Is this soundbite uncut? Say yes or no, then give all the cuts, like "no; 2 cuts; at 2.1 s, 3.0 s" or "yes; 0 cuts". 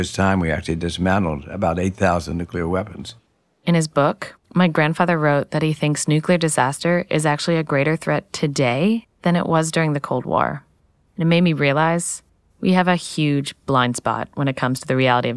yes; 0 cuts